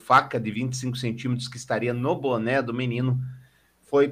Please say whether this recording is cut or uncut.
uncut